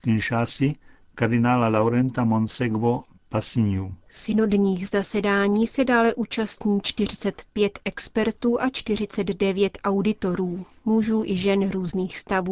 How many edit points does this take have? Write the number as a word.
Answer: one